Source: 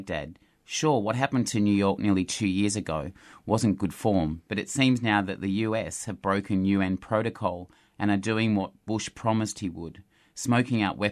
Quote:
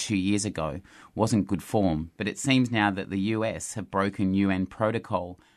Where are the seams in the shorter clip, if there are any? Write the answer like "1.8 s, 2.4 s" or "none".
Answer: none